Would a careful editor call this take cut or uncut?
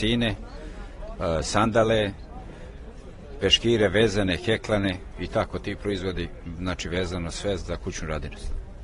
cut